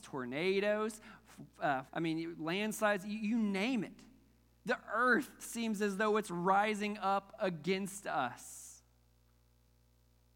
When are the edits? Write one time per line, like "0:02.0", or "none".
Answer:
0:01.9